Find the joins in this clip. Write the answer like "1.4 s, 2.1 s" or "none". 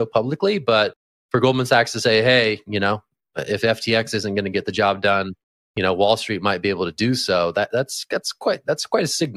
none